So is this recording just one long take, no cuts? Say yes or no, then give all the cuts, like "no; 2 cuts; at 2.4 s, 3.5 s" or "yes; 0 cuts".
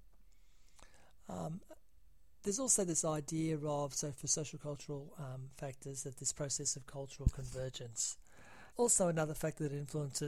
no; 1 cut; at 8.7 s